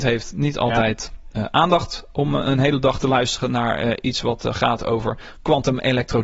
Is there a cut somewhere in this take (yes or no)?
no